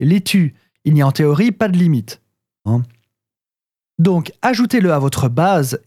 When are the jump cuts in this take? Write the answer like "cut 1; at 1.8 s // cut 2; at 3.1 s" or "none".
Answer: cut 1; at 2.7 s